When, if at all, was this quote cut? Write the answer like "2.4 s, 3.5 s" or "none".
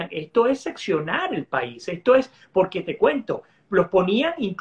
none